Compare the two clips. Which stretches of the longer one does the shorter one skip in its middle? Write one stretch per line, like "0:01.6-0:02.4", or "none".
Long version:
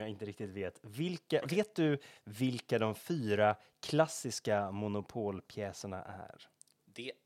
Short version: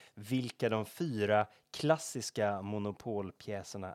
none